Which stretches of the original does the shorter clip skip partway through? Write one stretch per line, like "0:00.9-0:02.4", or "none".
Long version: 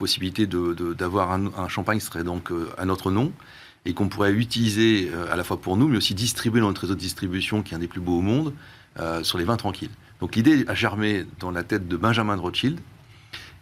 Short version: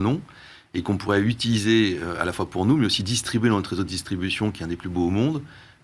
none